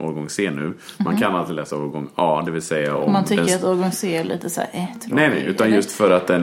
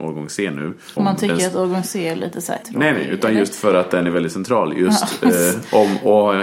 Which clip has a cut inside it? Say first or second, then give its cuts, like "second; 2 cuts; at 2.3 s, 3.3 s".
second; 2 cuts; at 1.0 s, 2.6 s